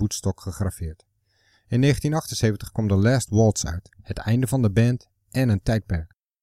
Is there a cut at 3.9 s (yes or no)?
yes